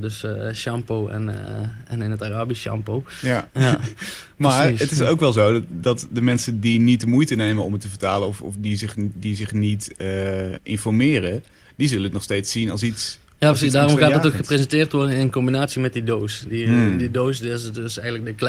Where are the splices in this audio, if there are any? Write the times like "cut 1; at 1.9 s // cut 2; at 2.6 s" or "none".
cut 1; at 3.5 s